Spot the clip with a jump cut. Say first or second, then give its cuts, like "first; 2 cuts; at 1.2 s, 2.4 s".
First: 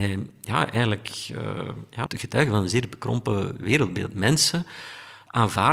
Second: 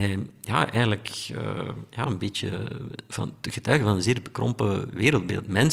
first; 1 cut; at 2.1 s